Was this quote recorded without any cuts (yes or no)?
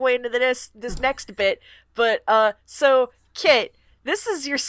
yes